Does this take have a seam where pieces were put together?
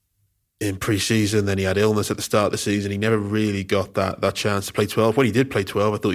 no; 0 cuts

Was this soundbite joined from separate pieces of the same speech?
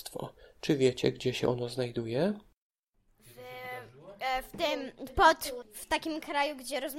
yes; 1 cut; at 5.6 s

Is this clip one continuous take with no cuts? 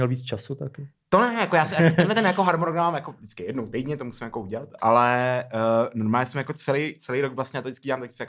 yes; 0 cuts

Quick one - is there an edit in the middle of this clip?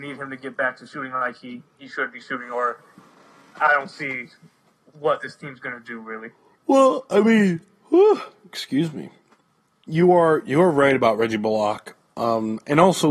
no; 0 cuts

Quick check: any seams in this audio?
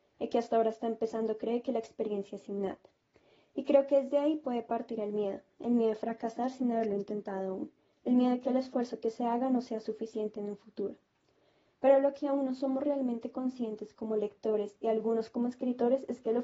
no; 0 cuts

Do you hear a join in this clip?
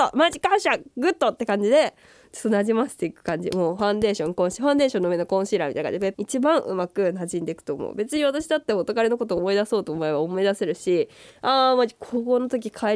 yes; 1 cut; at 6.1 s

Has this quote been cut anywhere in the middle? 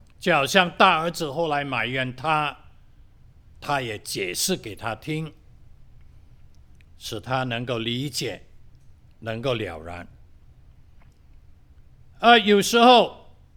no; 0 cuts

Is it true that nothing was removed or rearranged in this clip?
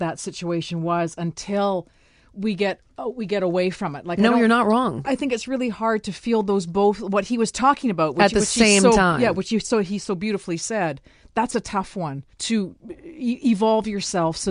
no; 2 cuts; at 5.0 s, 12.3 s

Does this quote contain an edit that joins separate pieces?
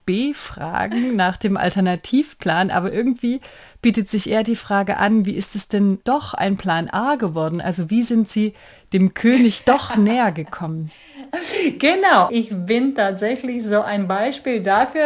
yes; 2 cuts; at 2.7 s, 12.3 s

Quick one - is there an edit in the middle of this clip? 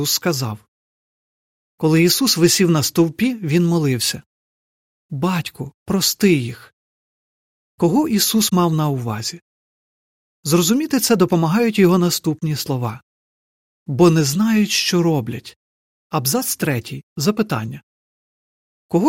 yes; 1 cut; at 15.9 s

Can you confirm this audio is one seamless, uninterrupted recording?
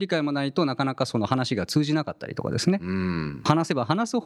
yes; 0 cuts

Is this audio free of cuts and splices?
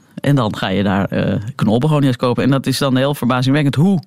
yes; 0 cuts

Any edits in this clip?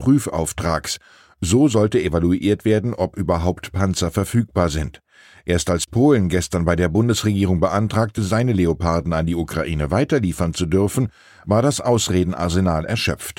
no; 0 cuts

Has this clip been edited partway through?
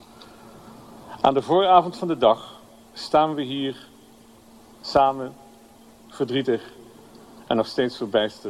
yes; 1 cut; at 2.8 s

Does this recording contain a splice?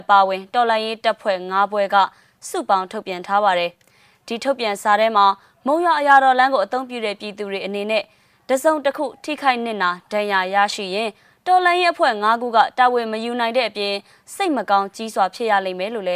no; 0 cuts

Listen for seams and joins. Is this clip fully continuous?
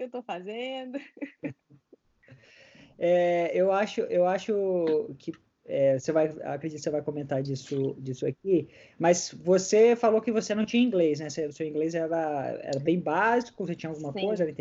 yes; 0 cuts

